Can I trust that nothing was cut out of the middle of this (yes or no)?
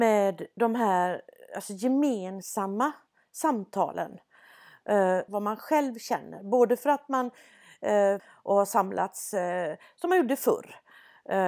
no